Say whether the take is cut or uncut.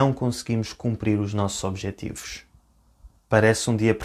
cut